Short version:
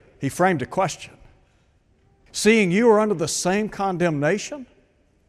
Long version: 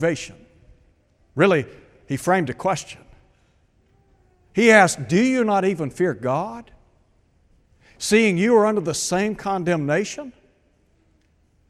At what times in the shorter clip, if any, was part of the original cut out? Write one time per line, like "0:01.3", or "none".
0:02.3